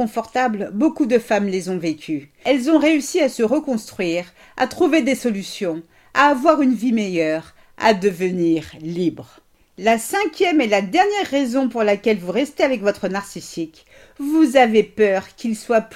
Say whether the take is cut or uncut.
uncut